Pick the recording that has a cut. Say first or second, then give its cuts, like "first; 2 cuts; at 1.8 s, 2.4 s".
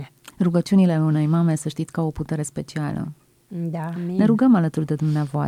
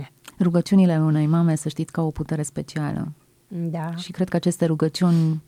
first; 1 cut; at 4.0 s